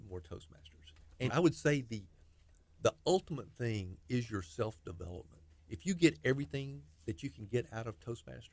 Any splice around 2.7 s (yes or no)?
no